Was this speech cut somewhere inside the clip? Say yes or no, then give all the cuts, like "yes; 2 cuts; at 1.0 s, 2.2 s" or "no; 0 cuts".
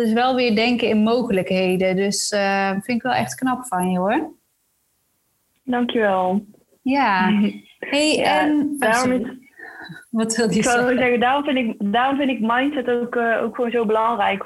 no; 0 cuts